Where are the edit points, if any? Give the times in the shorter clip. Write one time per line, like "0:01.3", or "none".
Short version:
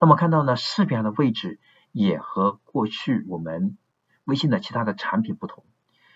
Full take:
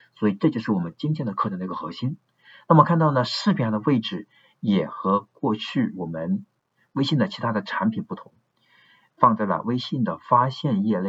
none